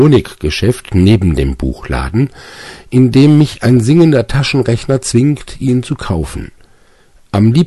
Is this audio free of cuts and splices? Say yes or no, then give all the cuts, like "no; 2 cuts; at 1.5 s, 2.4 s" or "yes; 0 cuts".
yes; 0 cuts